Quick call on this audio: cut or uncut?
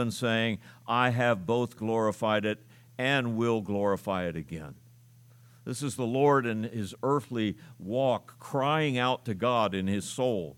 uncut